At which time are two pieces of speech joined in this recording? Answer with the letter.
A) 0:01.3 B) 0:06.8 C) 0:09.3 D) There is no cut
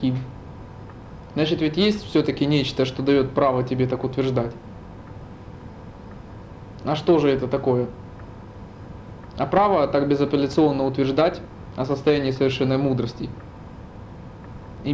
D